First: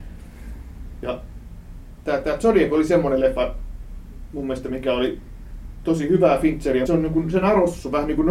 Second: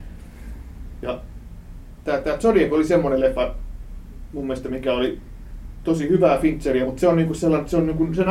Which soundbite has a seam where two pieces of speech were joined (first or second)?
first